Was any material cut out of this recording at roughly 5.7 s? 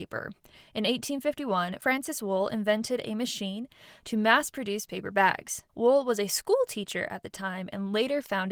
yes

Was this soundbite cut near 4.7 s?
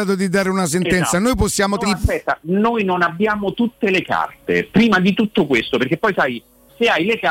no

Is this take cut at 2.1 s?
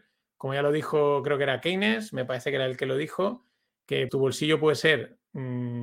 no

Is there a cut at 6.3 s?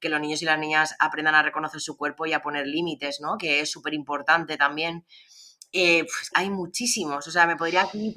yes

